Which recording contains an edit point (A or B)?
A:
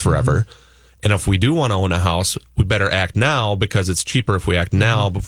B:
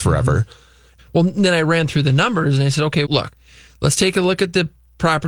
B